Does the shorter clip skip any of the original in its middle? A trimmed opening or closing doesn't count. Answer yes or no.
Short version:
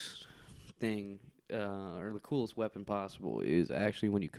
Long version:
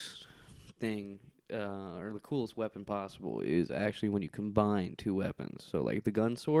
no